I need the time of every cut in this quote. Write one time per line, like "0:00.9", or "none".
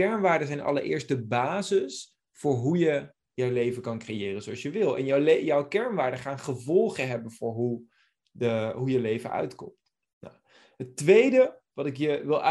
none